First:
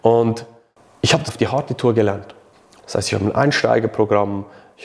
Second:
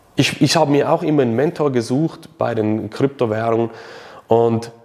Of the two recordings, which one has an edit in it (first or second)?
first